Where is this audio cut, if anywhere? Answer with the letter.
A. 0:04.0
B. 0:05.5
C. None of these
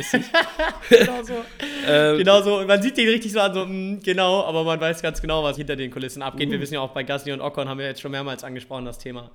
B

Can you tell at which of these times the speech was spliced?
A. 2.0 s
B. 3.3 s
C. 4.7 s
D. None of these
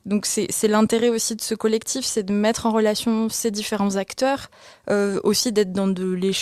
D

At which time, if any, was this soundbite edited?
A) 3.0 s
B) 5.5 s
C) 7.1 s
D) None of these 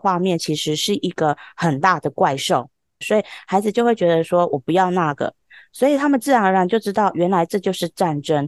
A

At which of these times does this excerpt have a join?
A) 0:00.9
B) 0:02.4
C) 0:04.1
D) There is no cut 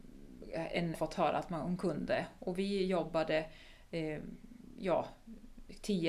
A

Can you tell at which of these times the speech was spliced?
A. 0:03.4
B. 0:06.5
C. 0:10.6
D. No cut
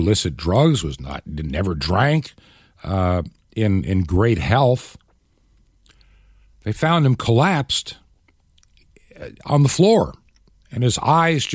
D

